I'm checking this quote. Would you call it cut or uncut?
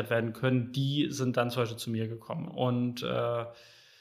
cut